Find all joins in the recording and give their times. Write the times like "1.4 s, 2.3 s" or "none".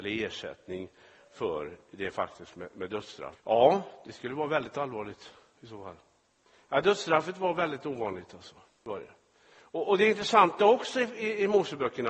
3.4 s